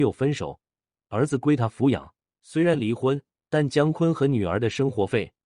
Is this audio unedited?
no; 1 cut; at 2.3 s

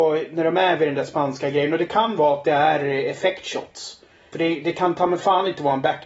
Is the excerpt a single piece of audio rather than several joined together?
no; 1 cut; at 4.3 s

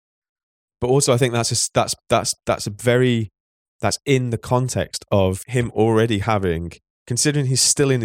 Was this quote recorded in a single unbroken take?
yes; 0 cuts

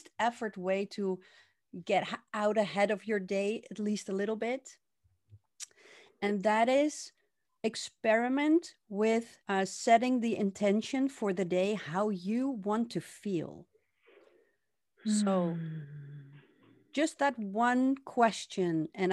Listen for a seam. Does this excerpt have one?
yes; 1 cut; at 9.4 s

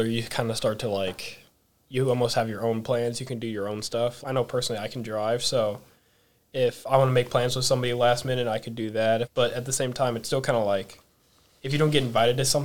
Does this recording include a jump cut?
yes; 2 cuts; at 4.2 s, 9.2 s

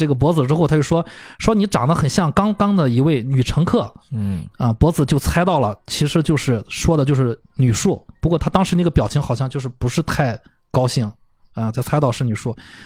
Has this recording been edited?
no; 0 cuts

